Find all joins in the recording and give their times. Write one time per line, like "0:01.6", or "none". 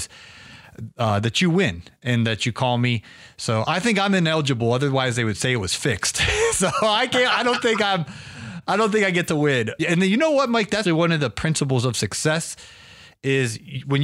0:09.8
0:10.9